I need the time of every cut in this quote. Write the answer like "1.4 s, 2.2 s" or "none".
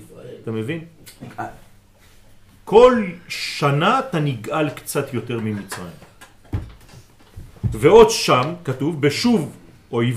none